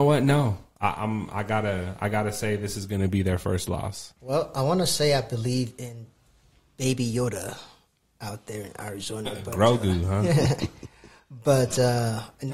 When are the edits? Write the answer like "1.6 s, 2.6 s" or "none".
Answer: 4.2 s

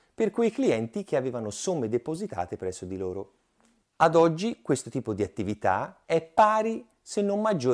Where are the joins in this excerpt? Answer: 3.9 s, 6.0 s

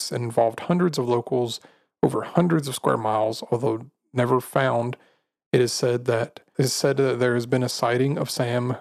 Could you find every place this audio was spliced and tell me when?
6.5 s

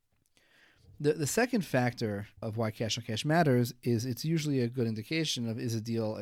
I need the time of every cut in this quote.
2.4 s

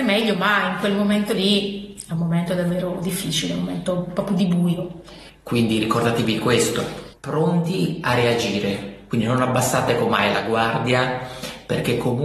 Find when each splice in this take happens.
5.3 s, 7.1 s

